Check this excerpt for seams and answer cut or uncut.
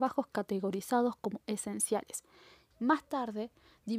cut